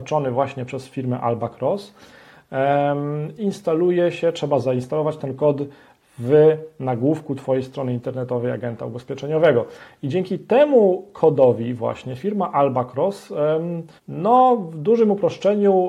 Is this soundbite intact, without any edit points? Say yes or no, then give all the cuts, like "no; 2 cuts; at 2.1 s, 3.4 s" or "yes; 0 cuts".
no; 2 cuts; at 3.4 s, 14.0 s